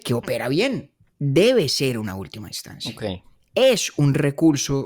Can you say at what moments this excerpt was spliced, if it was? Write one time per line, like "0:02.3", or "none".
0:01.1